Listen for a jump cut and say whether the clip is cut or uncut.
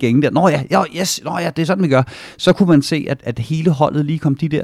cut